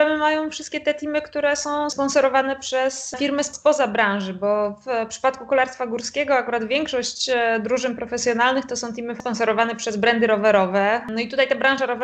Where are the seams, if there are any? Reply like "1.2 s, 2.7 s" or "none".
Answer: none